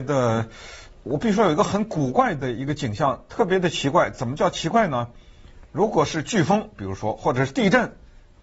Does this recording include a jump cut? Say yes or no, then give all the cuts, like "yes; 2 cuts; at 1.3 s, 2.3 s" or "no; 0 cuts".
no; 0 cuts